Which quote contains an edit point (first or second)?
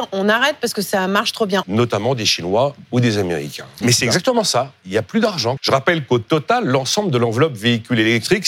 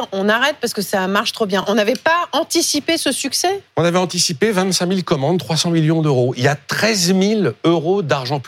first